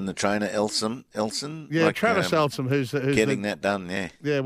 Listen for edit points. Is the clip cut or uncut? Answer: uncut